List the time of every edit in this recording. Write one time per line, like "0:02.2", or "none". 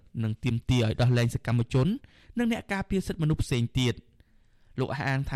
none